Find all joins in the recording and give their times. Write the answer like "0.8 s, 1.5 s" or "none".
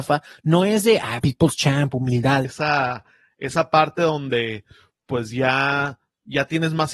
1.2 s, 2.4 s